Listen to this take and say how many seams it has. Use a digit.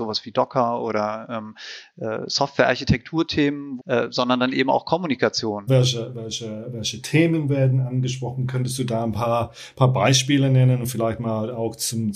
2